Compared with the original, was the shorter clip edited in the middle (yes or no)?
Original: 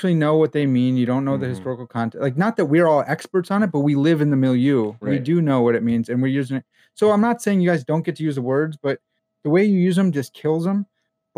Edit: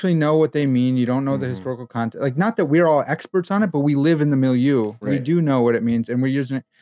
no